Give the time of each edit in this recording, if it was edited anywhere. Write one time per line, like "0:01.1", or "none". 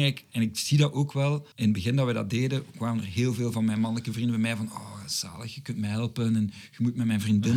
0:01.5